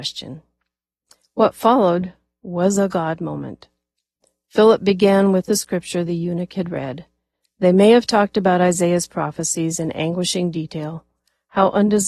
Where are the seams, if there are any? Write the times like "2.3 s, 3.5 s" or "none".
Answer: none